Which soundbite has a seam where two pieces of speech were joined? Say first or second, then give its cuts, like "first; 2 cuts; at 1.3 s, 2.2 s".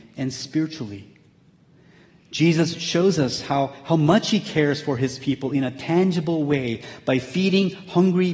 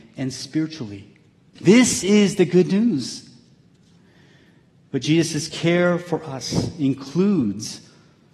second; 1 cut; at 1.6 s